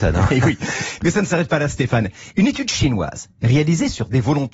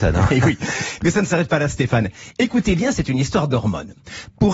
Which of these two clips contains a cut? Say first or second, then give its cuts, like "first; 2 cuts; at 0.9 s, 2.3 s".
first; 1 cut; at 2.3 s